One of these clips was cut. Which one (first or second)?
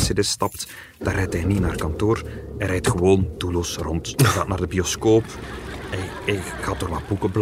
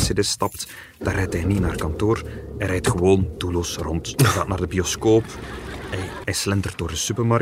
second